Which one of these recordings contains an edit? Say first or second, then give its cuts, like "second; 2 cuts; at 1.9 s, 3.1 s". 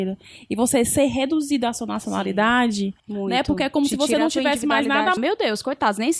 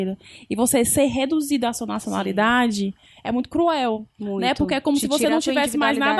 first; 2 cuts; at 3.0 s, 5.2 s